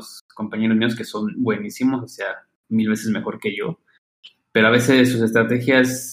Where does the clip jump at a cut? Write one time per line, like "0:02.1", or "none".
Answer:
none